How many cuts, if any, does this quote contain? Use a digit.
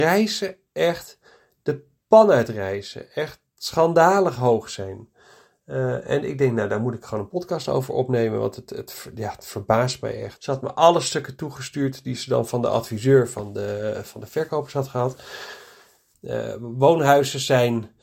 2